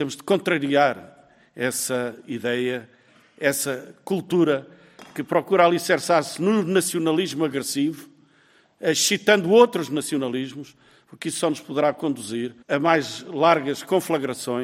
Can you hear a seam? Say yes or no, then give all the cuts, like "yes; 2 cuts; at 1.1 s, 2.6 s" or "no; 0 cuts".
yes; 1 cut; at 12.6 s